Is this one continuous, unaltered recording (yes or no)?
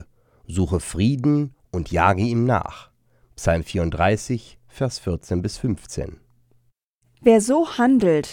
yes